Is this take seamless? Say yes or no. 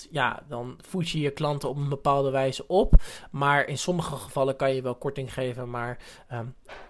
yes